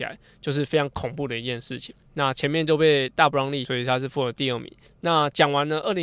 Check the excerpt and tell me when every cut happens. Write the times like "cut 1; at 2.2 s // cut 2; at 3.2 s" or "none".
cut 1; at 2.1 s // cut 2; at 3.6 s // cut 3; at 4.9 s

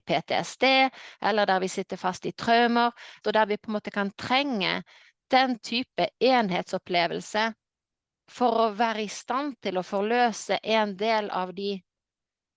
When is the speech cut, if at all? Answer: cut 1; at 3.2 s

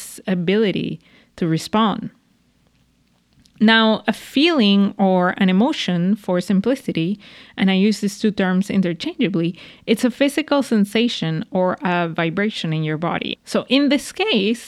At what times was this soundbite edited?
cut 1; at 13.4 s

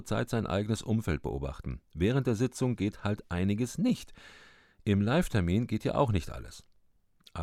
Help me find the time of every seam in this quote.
none

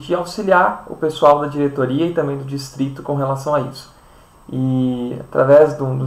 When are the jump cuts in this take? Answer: cut 1; at 4.3 s

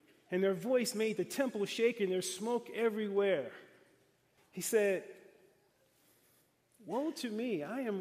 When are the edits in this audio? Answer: cut 1; at 4.4 s

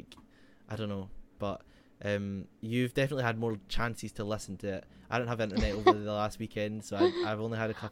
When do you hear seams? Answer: cut 1; at 1.4 s // cut 2; at 2.5 s

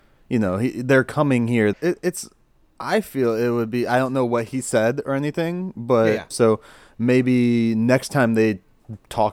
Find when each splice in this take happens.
cut 1; at 1.7 s // cut 2; at 6.3 s

